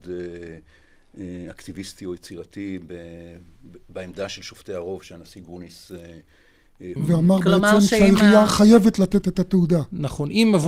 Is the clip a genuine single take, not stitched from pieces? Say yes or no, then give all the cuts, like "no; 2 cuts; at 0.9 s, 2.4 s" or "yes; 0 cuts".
no; 1 cut; at 7.0 s